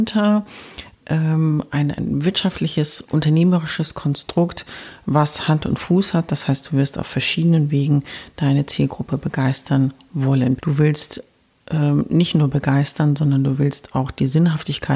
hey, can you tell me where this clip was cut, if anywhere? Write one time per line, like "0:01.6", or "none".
0:10.6